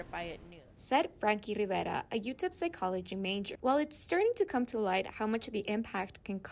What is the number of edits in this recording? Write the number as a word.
one